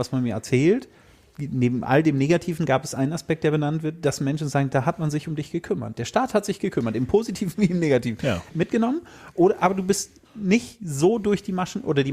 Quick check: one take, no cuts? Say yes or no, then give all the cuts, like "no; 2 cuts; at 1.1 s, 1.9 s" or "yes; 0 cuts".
no; 2 cuts; at 8.5 s, 10.2 s